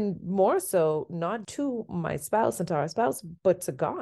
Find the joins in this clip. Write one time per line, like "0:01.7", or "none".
0:01.4

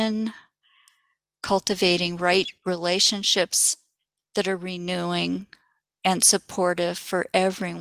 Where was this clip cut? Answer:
none

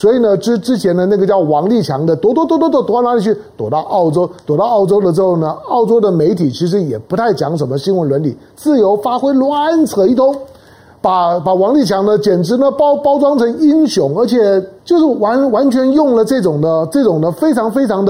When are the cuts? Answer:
0:14.8

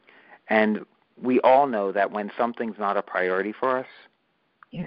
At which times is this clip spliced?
none

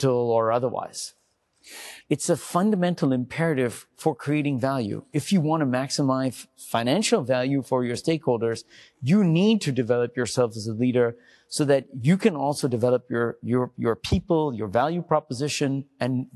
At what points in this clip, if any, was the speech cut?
0:02.0

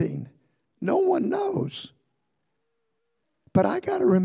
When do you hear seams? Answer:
none

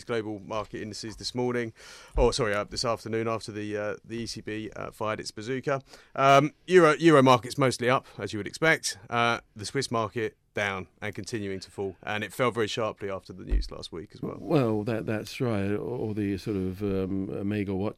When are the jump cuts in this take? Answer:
none

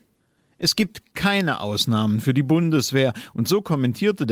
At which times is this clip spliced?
none

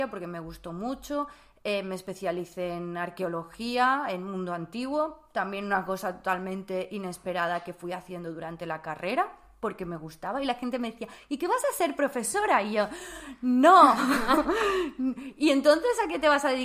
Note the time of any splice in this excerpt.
none

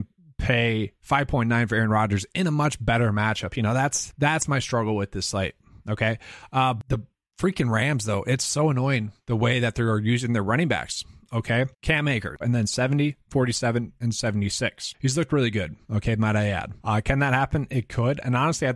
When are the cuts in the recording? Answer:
0:12.4
0:16.8

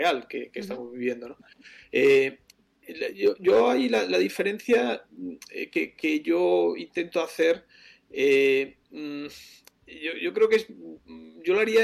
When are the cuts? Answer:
none

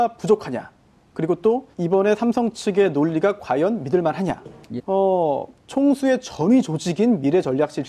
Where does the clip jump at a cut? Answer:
0:01.7
0:04.8

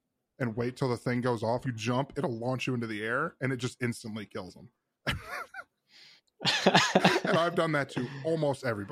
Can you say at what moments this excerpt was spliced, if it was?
0:01.6

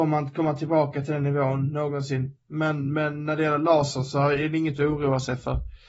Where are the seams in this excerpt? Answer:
0:02.4

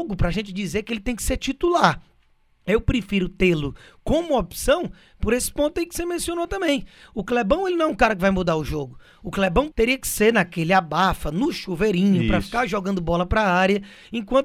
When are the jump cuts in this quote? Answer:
0:09.7

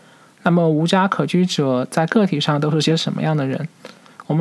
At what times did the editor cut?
none

